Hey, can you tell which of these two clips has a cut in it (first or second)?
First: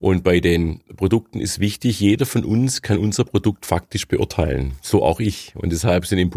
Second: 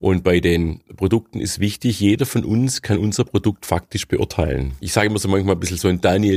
second